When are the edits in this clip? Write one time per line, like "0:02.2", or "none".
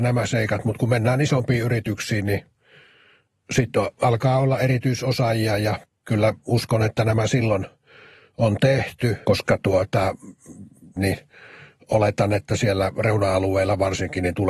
0:09.2
0:11.0